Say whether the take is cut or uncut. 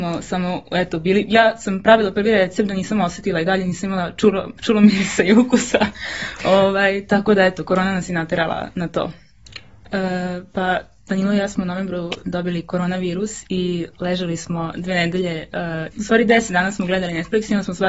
cut